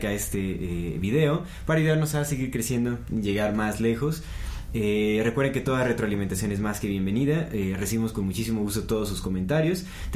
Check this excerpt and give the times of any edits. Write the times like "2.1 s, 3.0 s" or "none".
none